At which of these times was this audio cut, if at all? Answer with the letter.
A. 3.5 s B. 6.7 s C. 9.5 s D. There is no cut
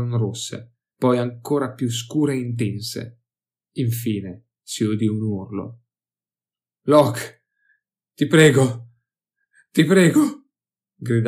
B